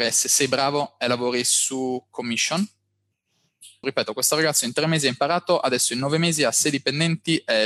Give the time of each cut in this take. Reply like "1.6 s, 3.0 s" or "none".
3.8 s